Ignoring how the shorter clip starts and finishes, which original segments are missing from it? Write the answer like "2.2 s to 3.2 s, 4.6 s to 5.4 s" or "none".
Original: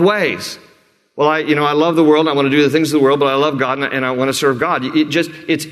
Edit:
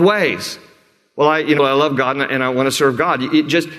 1.6 s to 3.2 s